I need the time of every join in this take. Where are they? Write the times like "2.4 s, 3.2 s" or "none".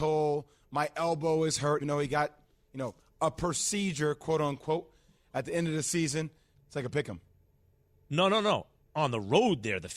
1.8 s, 6.5 s

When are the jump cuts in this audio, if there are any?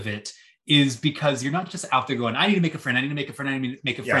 none

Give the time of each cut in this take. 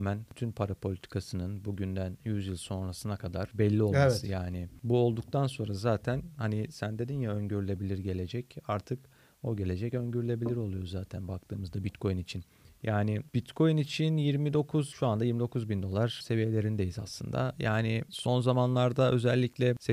none

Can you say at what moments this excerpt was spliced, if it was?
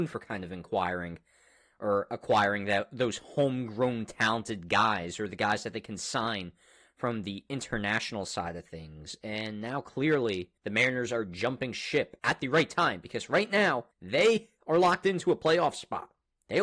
10.6 s, 13.9 s

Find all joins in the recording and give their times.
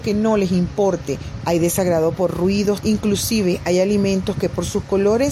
1.4 s, 2.8 s

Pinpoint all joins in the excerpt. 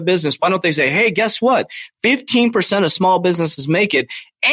none

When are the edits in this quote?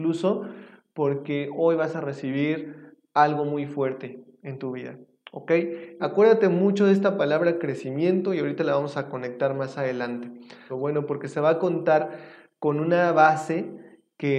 6.0 s, 10.7 s

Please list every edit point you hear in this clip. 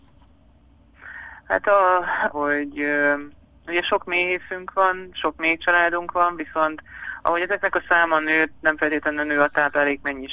2.3 s

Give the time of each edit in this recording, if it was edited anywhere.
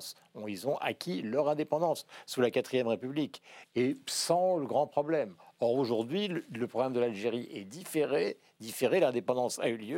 none

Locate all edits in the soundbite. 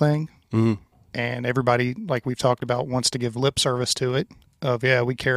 0.9 s

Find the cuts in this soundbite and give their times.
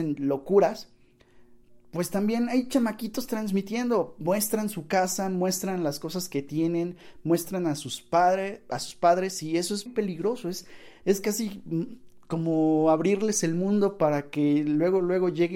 9.9 s

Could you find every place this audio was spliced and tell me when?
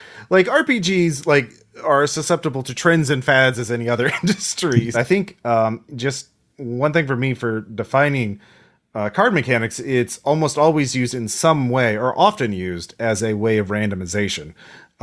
4.9 s

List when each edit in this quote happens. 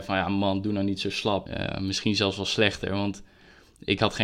1.5 s

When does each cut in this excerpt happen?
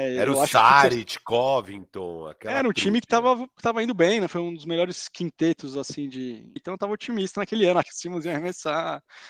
6.6 s, 7.8 s

